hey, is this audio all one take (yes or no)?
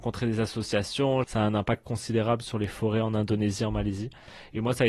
no